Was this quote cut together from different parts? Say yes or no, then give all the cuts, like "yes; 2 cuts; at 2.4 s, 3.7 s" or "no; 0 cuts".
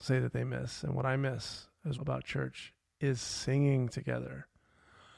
yes; 1 cut; at 1.9 s